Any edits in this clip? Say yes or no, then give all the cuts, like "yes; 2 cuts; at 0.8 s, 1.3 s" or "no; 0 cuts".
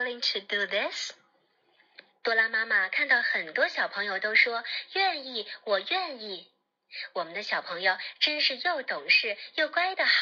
yes; 1 cut; at 2.2 s